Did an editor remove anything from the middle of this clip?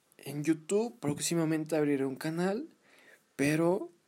no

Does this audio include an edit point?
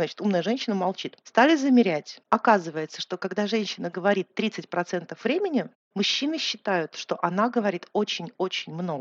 yes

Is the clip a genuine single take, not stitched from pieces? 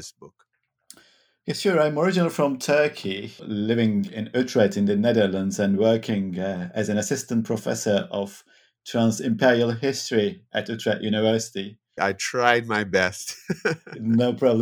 no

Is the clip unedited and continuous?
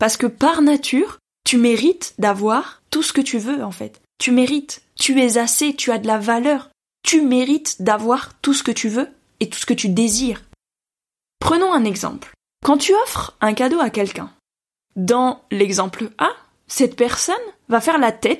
yes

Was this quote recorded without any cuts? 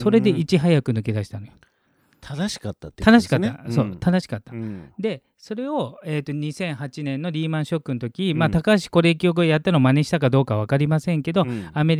yes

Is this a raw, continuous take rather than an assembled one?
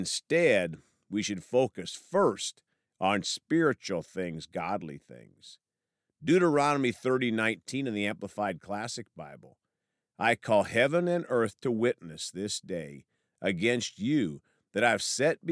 yes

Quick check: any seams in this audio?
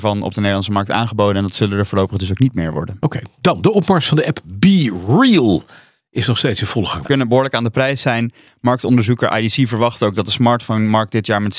yes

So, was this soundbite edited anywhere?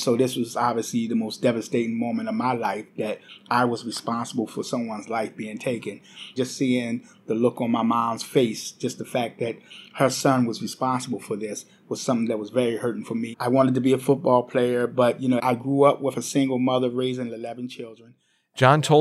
yes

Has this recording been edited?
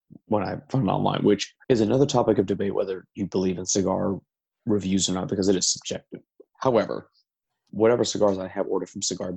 yes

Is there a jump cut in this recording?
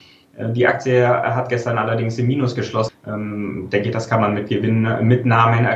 yes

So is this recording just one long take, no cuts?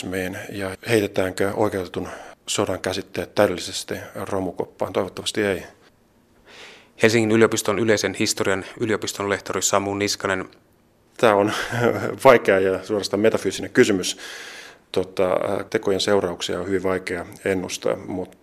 no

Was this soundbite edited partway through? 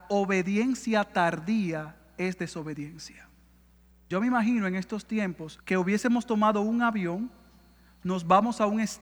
yes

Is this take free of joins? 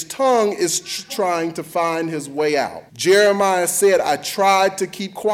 no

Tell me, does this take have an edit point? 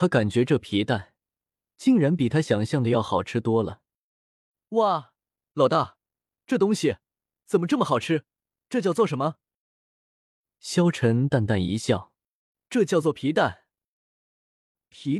no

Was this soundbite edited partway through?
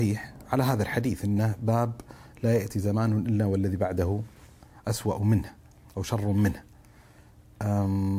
no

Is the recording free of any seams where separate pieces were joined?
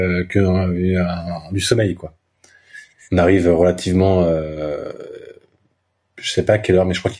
yes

